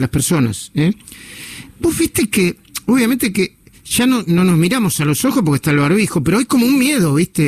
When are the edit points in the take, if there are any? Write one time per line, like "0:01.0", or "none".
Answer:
none